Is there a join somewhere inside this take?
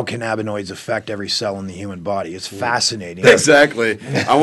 yes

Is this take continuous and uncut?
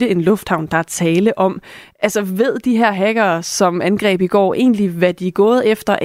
yes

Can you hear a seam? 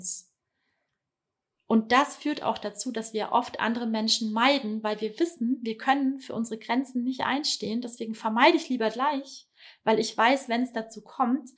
no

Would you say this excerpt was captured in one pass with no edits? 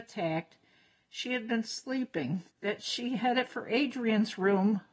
no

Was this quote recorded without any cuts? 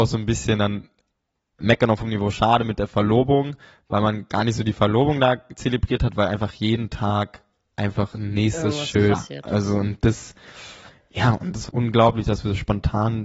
no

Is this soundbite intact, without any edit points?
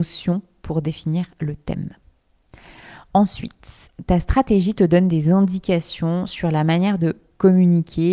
yes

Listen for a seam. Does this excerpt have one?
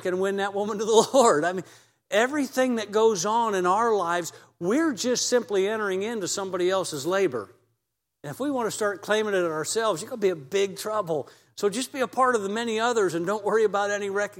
no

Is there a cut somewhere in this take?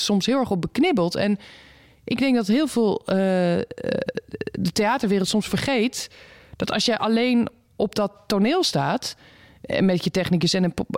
no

